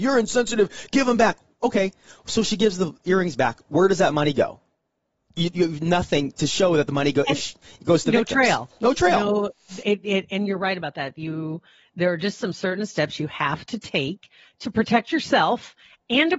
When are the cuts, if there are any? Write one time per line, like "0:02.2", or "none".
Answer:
0:09.8